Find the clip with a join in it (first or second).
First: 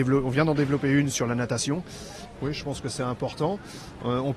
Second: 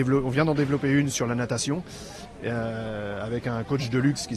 first